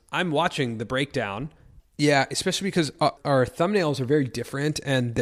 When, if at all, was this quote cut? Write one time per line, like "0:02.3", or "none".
0:01.8
0:03.2